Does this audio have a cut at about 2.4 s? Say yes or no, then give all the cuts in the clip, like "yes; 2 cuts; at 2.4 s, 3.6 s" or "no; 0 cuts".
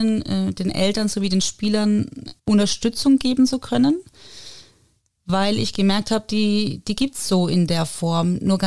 yes; 1 cut; at 2.4 s